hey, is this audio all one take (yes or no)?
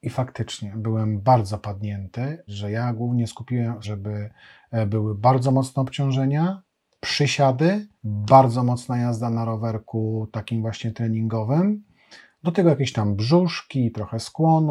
no